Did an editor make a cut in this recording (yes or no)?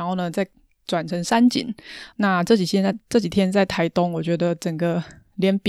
yes